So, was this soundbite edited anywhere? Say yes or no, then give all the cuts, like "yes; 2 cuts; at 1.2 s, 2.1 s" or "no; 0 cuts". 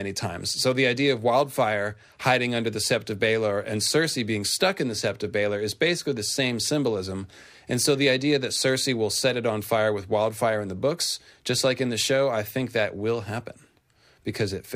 no; 0 cuts